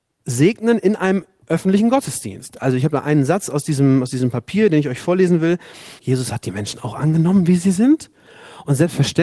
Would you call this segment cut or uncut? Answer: cut